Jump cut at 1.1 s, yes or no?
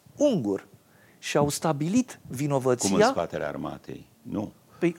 no